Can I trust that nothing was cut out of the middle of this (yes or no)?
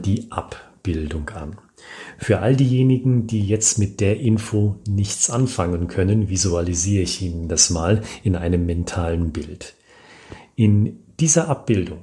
yes